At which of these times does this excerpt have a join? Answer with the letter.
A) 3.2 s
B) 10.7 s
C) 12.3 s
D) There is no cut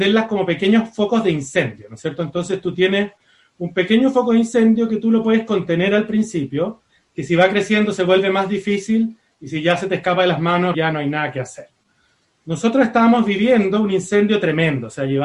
B